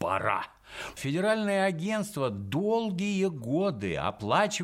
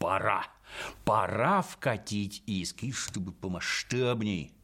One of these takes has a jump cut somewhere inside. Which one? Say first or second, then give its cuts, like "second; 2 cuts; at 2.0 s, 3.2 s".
first; 1 cut; at 1.0 s